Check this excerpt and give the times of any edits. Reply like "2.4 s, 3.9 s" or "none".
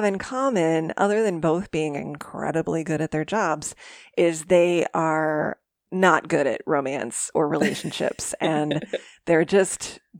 none